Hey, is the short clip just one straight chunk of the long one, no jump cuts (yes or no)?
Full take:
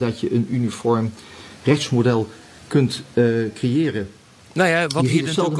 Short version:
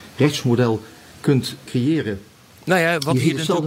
no